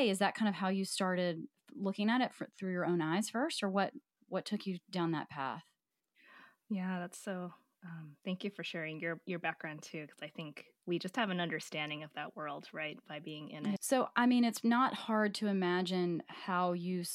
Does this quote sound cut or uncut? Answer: cut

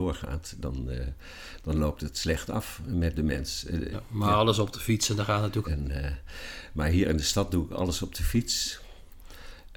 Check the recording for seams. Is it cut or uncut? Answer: cut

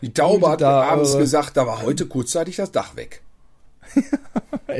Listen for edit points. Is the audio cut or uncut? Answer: uncut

